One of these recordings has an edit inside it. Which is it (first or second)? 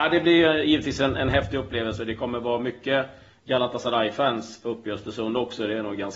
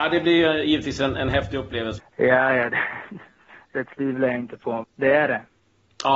second